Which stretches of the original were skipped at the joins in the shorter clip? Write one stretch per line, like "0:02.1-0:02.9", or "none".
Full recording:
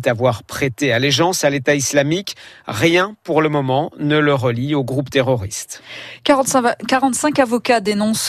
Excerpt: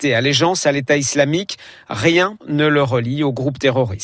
0:03.2-0:03.9